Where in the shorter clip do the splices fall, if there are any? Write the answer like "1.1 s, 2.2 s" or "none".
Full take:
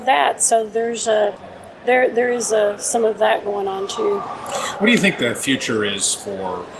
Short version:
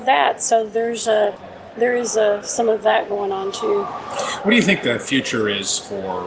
1.8 s